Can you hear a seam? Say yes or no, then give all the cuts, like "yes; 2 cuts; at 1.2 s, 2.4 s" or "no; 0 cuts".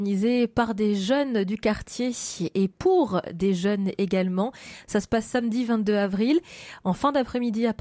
no; 0 cuts